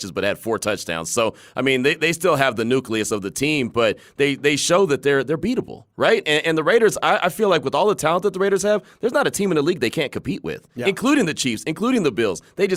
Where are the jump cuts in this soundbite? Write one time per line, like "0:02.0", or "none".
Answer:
none